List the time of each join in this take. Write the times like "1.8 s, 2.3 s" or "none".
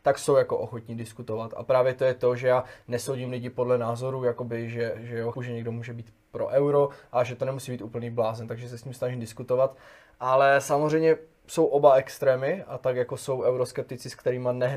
5.3 s